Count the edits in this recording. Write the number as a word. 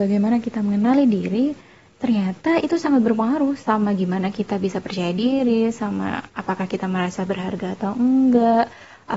zero